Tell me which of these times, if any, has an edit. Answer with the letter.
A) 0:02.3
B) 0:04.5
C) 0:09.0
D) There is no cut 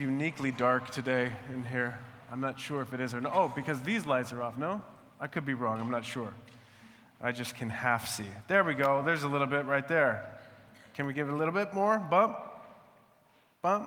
D